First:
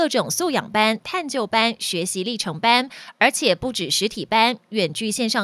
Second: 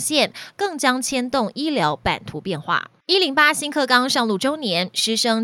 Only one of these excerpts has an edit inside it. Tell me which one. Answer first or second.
second